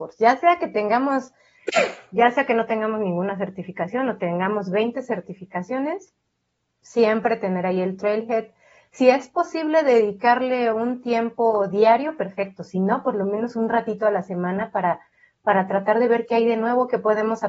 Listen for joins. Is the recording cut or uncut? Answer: uncut